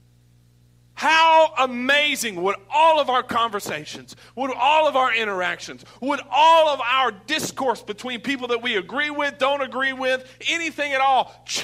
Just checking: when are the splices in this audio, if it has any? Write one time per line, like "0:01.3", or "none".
none